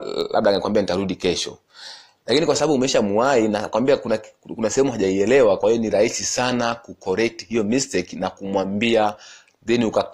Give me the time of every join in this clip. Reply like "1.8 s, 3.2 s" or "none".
none